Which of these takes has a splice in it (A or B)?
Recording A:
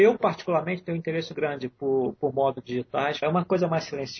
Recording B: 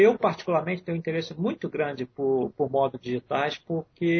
A